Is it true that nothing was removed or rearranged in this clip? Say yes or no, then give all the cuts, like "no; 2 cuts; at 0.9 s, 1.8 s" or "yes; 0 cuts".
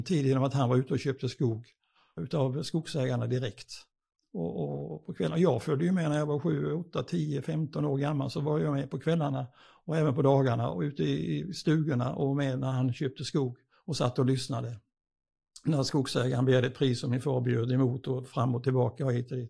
no; 1 cut; at 2.2 s